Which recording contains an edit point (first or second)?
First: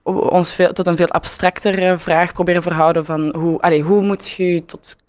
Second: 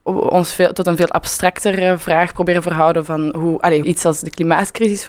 second